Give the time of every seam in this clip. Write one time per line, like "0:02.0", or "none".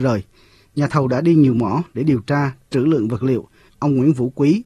0:03.7